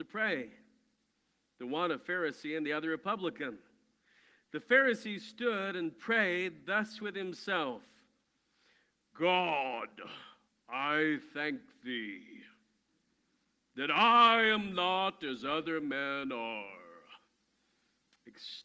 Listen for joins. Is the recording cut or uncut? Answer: uncut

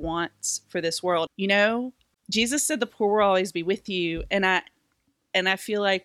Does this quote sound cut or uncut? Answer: cut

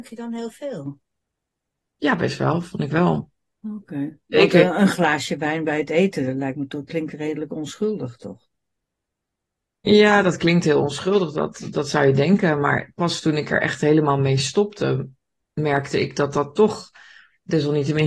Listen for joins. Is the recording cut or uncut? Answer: uncut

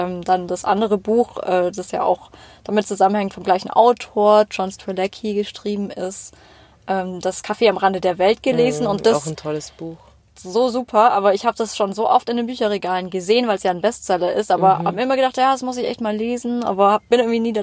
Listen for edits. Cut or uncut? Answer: uncut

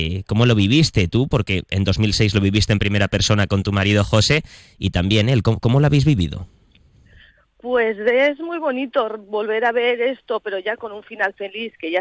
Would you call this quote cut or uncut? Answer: uncut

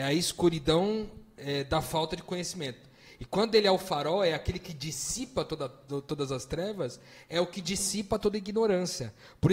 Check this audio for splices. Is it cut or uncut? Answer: uncut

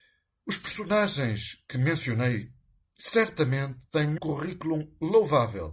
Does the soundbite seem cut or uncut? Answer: cut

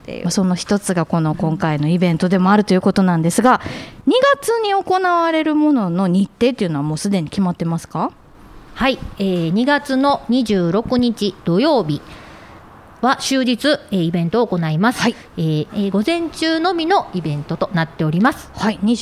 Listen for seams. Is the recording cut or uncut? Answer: cut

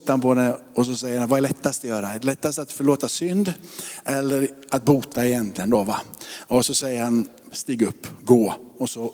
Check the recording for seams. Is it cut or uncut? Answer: cut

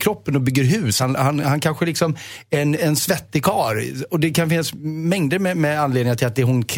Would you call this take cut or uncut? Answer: uncut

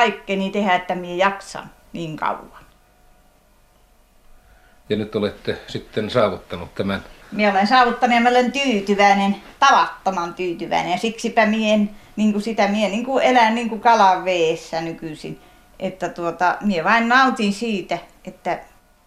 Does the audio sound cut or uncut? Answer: cut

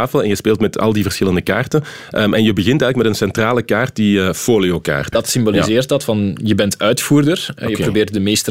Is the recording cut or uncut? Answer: cut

